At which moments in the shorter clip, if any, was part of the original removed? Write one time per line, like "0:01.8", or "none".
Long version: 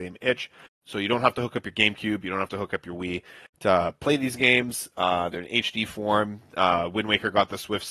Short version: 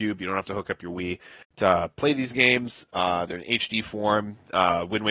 none